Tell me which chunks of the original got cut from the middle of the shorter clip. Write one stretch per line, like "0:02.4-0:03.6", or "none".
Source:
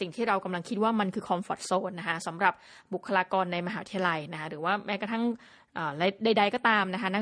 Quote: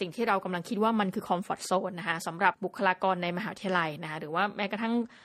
0:02.5-0:02.8